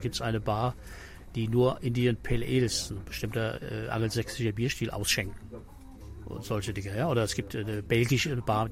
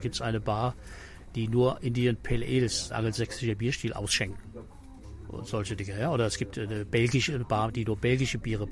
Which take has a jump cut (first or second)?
second